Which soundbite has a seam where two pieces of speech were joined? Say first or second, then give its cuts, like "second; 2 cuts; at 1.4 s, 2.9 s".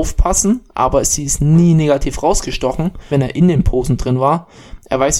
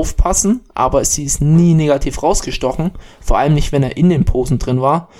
first; 1 cut; at 3.1 s